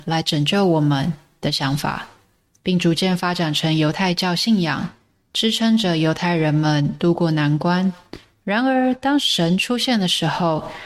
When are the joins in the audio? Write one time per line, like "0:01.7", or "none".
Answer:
none

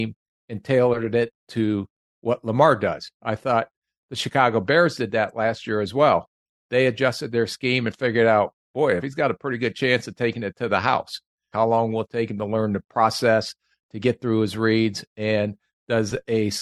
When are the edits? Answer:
0:09.0
0:11.5

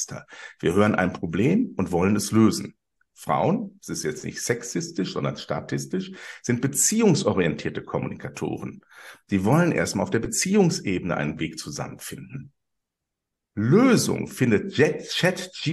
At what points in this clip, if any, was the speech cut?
none

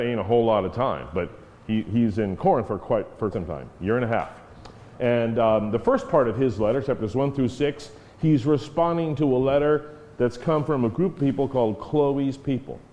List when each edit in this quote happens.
0:03.3
0:04.9

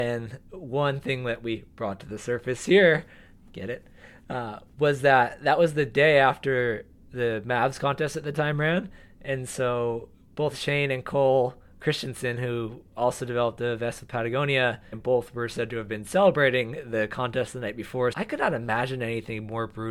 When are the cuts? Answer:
0:14.9
0:18.1

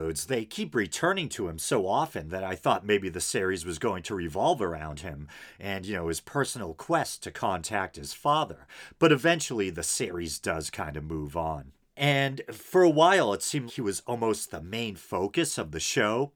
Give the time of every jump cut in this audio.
0:11.9
0:13.7

